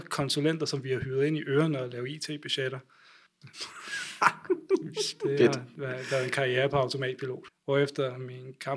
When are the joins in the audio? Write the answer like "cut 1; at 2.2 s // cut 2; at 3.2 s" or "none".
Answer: cut 1; at 3.4 s // cut 2; at 7.5 s

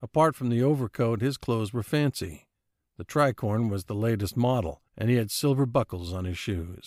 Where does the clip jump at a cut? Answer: cut 1; at 4.9 s

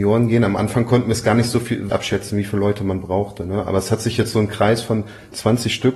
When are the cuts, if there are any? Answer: cut 1; at 1.9 s

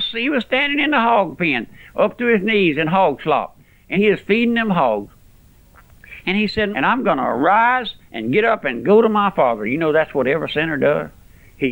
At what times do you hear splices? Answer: cut 1; at 3.9 s // cut 2; at 6.7 s

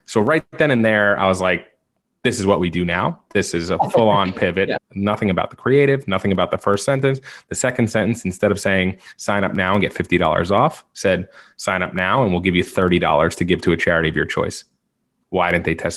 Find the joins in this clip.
cut 1; at 4.8 s

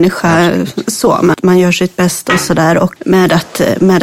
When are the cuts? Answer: cut 1; at 1.3 s // cut 2; at 3.0 s

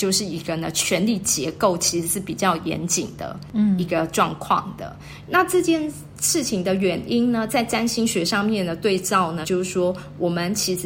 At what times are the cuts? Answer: cut 1; at 5.2 s // cut 2; at 9.4 s

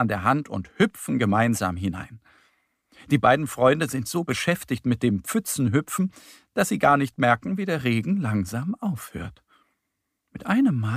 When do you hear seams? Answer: none

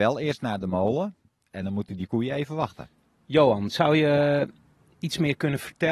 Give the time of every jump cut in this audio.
none

